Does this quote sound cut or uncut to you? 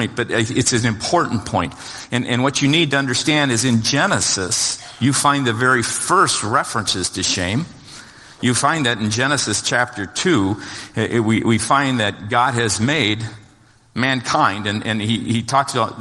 uncut